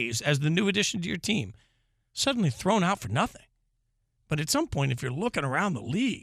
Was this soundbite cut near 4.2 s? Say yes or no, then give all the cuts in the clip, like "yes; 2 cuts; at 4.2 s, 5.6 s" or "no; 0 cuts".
yes; 1 cut; at 4.2 s